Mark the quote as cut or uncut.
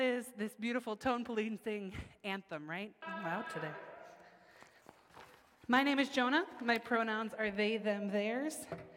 cut